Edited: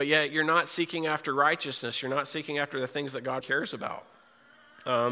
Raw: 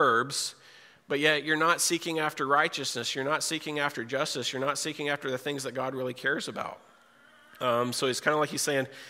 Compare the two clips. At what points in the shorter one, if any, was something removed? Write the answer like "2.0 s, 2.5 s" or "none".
2.0 s, 3.4 s